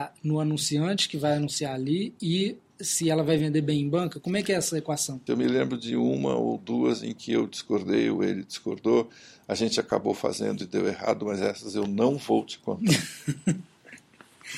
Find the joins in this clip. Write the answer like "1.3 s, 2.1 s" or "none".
5.3 s